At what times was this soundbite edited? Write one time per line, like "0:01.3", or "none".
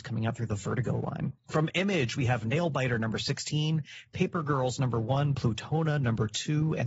0:01.4